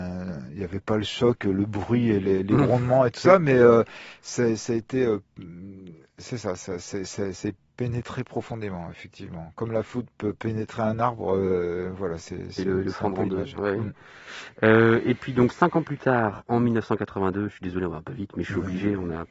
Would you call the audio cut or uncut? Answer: uncut